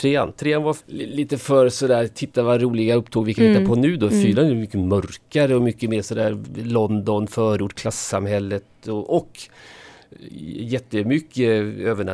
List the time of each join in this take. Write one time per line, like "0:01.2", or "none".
none